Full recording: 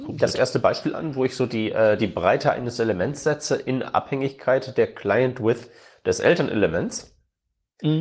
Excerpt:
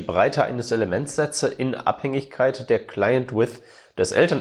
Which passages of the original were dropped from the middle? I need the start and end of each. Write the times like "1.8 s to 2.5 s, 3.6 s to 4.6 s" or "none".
none